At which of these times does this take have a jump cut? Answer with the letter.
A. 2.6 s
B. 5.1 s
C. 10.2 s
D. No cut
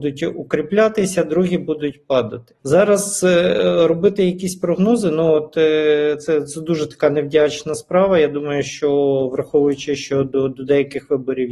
A